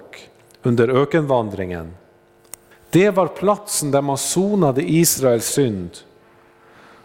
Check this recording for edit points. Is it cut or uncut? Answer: cut